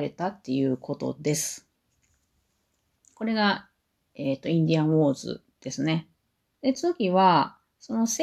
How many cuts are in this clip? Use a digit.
1